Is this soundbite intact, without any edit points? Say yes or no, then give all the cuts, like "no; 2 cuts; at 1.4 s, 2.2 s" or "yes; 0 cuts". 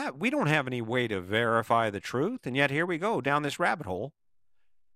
yes; 0 cuts